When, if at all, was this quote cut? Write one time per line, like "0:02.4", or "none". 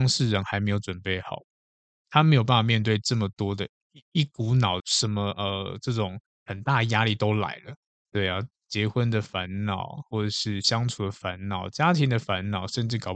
0:04.8

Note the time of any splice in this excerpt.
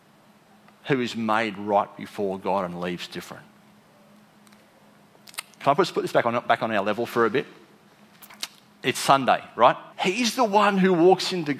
0:09.9

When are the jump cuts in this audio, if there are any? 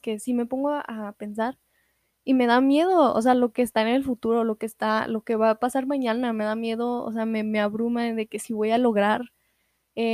none

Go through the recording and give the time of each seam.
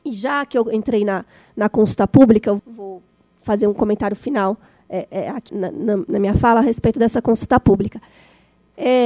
0:02.6
0:05.5

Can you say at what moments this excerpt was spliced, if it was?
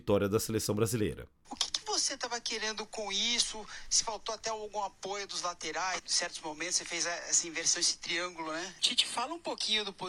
0:01.4
0:06.0
0:08.8

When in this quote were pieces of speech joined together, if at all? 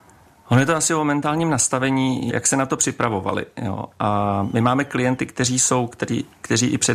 0:02.3

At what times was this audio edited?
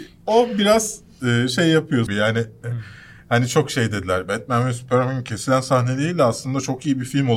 0:02.1

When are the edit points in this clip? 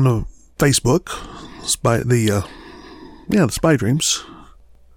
none

